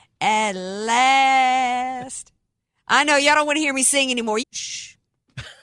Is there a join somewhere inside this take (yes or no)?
yes